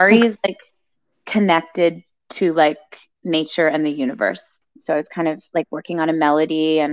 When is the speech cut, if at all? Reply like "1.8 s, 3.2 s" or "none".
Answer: 4.6 s